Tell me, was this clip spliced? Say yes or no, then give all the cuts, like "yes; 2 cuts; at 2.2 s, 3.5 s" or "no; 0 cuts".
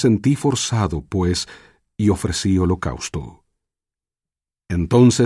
no; 0 cuts